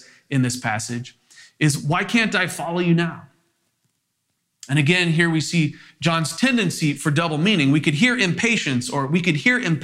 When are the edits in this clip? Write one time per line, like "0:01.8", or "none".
none